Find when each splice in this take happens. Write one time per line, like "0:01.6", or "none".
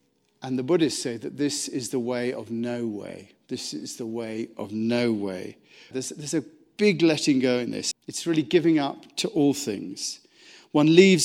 0:05.9
0:07.9